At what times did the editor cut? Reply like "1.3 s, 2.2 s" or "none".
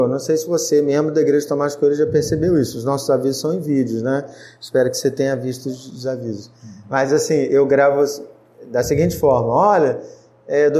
none